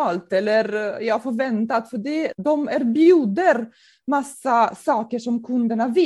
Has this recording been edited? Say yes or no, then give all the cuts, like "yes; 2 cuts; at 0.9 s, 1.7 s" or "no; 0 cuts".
no; 0 cuts